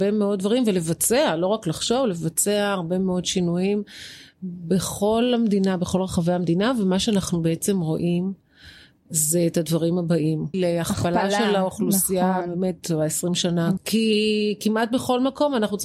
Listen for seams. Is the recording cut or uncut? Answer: cut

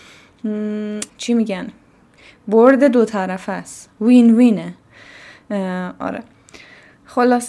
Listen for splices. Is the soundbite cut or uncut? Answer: cut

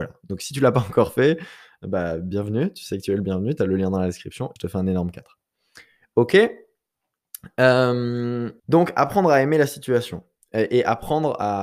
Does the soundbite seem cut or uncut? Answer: cut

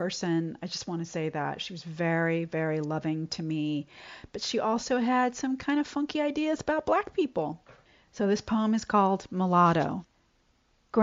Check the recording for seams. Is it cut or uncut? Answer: uncut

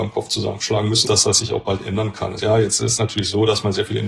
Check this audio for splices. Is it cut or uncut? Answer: cut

